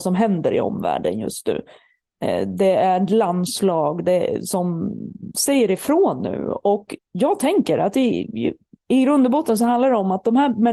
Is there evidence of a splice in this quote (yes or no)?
yes